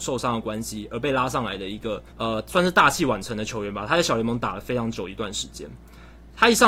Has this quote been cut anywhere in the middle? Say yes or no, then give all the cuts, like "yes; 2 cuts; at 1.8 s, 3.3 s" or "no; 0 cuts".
yes; 1 cut; at 2.1 s